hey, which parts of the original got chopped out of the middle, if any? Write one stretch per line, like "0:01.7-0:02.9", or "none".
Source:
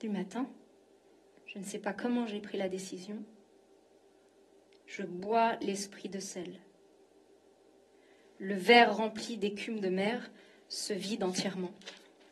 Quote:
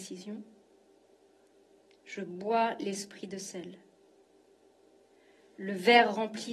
none